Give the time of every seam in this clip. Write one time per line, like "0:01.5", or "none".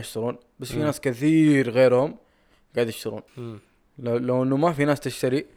0:03.3

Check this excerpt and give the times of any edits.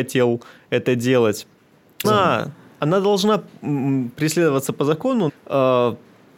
0:02.0
0:05.3

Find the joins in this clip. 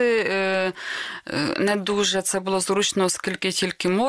0:01.5

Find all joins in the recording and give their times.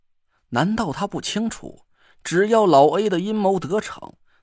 none

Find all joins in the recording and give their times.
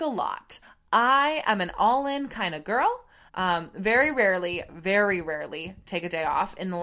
0:03.3

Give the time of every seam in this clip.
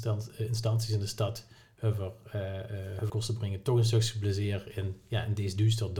0:03.1

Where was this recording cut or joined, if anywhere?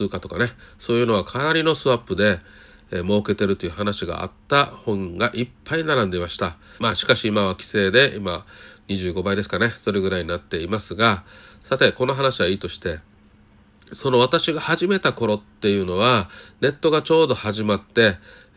0:06.8

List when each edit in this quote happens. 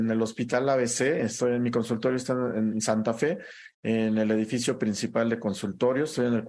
none

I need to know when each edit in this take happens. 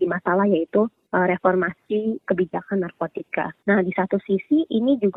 none

